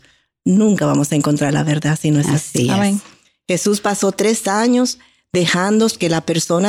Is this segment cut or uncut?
uncut